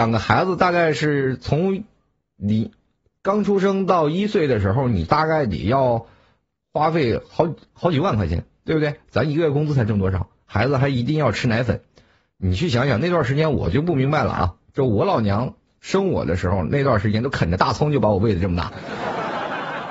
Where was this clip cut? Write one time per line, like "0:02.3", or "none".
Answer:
none